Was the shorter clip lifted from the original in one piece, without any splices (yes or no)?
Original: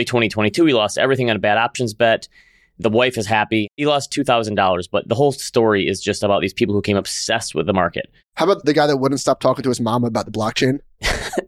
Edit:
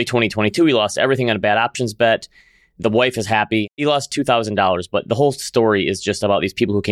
yes